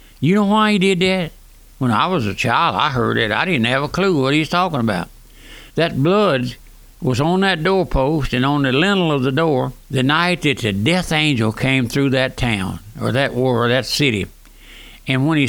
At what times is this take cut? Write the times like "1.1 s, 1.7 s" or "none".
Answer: 5.7 s, 9.8 s